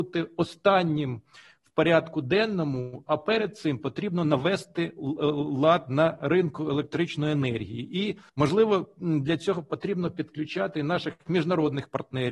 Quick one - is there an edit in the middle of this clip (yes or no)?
yes